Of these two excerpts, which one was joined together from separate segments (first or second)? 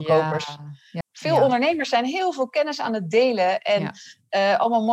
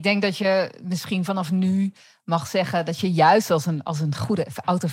first